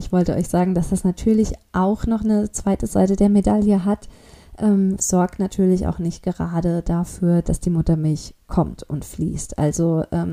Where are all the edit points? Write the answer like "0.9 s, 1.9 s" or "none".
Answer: 5.0 s, 7.4 s

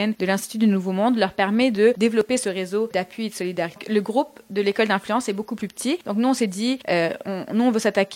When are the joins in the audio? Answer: none

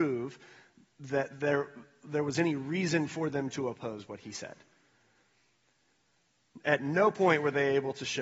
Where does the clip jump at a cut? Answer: none

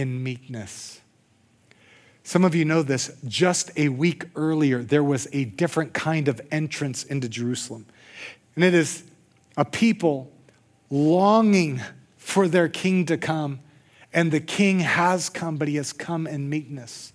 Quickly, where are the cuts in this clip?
8.4 s

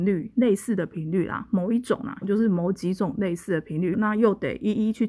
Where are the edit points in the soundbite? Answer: 2.2 s, 3.9 s

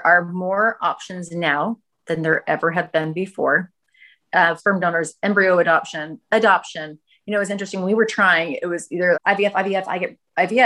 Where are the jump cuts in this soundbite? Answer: 4.6 s, 9.1 s

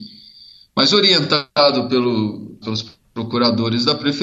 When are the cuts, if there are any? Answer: 2.6 s

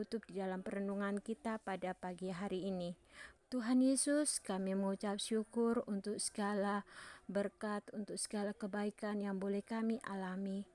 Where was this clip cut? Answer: 3.4 s

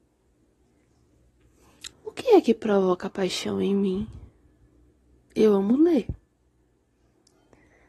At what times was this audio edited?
1.9 s

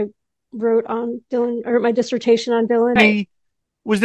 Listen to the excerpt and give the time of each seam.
3.0 s

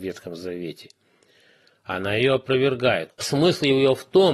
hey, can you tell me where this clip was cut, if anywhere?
3.1 s

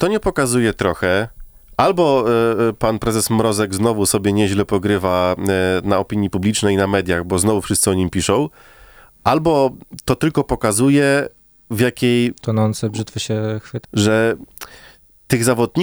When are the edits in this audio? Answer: 13.8 s

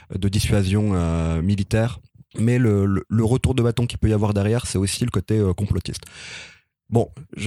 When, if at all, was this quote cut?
none

